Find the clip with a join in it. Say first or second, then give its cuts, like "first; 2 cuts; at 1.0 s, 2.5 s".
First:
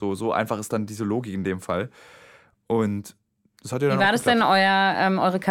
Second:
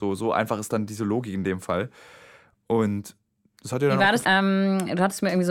second; 1 cut; at 4.2 s